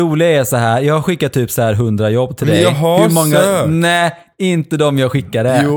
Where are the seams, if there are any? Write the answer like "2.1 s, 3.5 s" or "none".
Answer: none